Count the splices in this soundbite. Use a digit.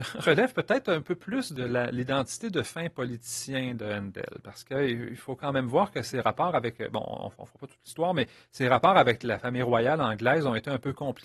0